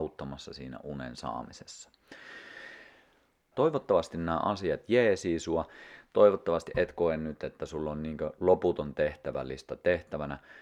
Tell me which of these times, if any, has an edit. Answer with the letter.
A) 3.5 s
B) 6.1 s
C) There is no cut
A